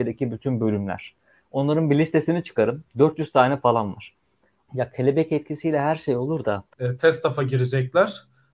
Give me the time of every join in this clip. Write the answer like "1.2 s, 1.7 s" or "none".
4.6 s, 6.7 s